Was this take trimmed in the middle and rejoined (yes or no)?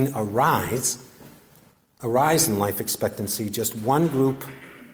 no